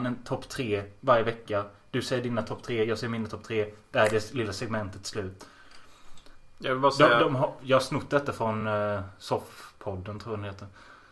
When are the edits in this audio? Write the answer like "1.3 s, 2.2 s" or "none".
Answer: none